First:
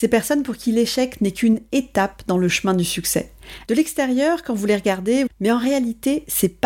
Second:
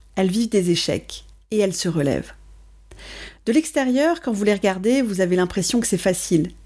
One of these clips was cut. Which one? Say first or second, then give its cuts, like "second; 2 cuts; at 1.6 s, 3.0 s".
first; 2 cuts; at 3.7 s, 5.3 s